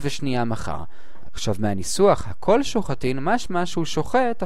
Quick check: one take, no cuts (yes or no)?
no